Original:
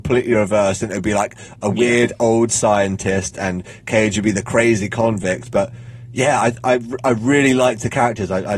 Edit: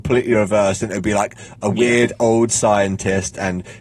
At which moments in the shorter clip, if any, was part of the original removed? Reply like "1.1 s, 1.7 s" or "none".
none

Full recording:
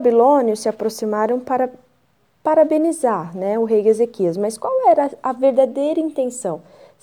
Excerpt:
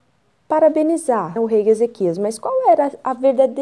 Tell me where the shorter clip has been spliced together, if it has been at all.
1.4 s

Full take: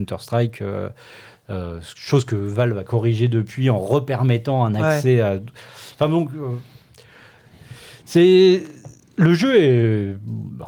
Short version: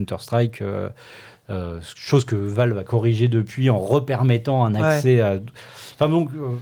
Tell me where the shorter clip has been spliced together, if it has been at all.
none

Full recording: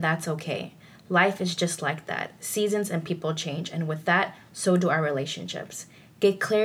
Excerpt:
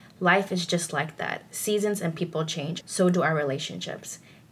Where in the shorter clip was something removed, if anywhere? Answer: 2.8 s

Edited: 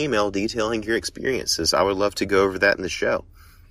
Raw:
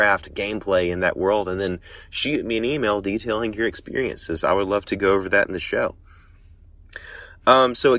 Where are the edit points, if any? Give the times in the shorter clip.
none

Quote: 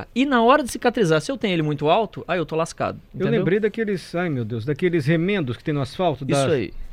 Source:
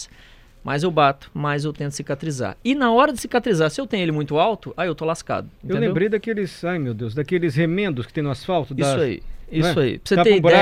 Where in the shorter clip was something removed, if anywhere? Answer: none

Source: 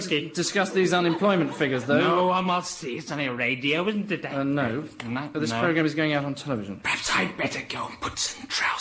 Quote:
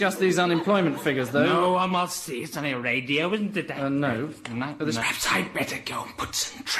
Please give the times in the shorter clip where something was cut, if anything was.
5.0 s

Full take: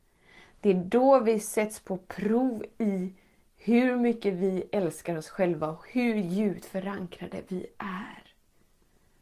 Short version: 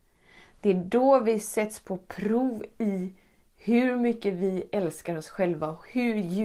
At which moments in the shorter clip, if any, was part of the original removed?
none

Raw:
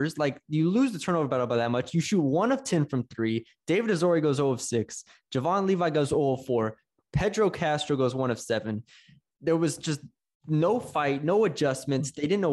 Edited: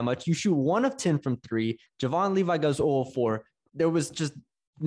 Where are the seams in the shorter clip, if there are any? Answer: 1.9 s, 3.7 s

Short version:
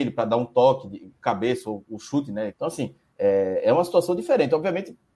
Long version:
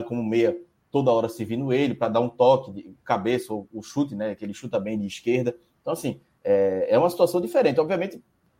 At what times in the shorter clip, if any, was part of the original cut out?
2.5 s

